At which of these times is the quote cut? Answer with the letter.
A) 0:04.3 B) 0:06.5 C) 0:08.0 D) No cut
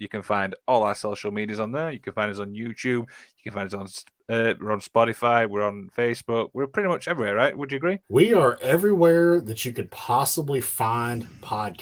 C